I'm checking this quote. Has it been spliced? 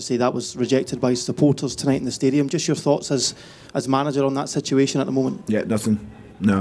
no; 0 cuts

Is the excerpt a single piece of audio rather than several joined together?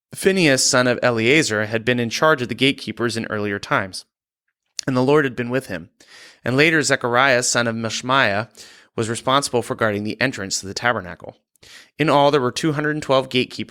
yes; 0 cuts

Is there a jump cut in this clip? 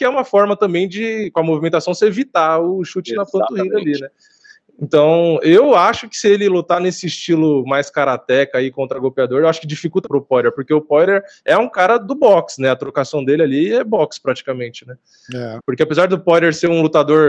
yes; 2 cuts; at 10.1 s, 15.6 s

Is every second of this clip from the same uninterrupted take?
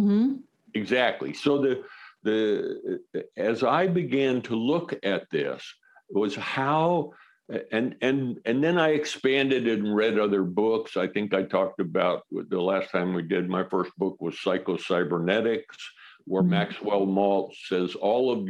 yes; 0 cuts

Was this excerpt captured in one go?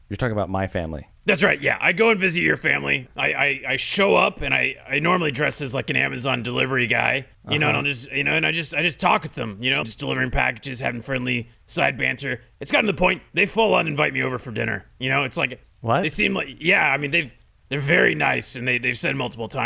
no; 2 cuts; at 7.3 s, 9.8 s

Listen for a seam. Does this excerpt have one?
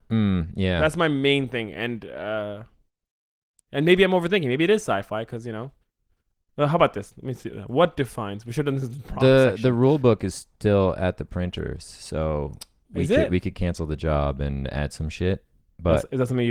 no; 0 cuts

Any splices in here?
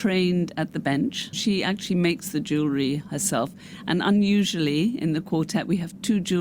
yes; 1 cut; at 1.3 s

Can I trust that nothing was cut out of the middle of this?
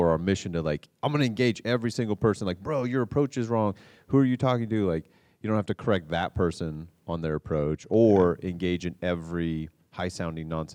yes; 0 cuts

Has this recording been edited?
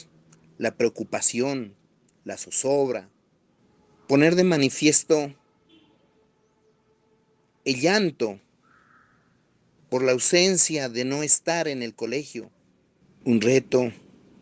yes; 1 cut; at 13.2 s

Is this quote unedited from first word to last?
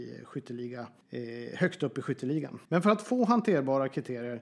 no; 1 cut; at 2.7 s

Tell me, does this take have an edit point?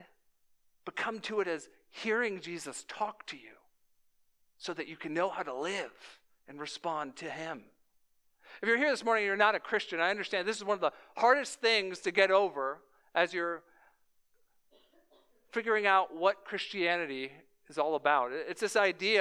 no; 0 cuts

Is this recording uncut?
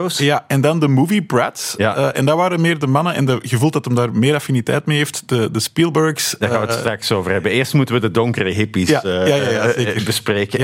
yes; 0 cuts

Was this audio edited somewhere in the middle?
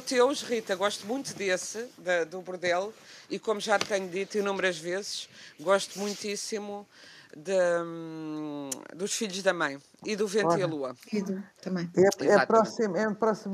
no; 0 cuts

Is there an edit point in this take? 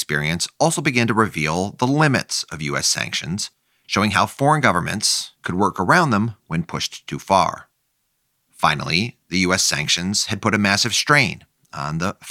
yes; 1 cut; at 5.3 s

